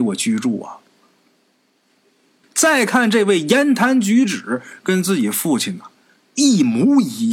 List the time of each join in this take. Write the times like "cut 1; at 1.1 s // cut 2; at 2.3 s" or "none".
cut 1; at 2.4 s